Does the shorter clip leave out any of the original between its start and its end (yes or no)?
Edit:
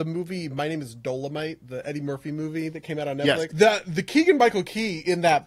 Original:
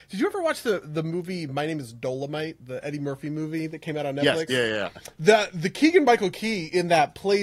yes